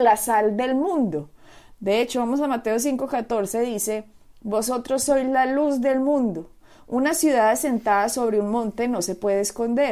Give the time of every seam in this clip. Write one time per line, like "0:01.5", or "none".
none